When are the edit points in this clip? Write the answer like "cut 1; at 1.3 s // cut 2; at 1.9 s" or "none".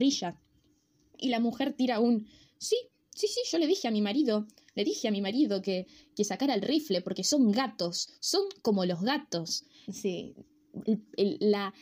cut 1; at 9.8 s